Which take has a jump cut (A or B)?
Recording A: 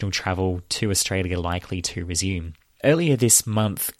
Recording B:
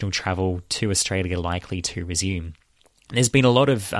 A